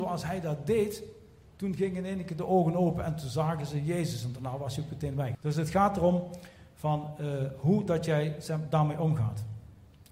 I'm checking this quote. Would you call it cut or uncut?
cut